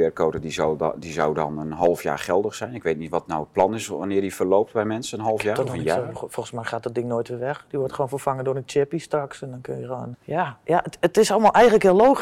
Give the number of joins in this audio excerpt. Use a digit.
1